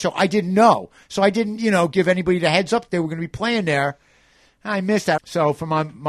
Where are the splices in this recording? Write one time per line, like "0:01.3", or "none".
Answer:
0:05.2